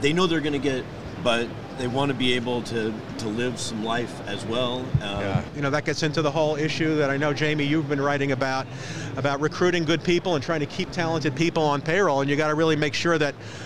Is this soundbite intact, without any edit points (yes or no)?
no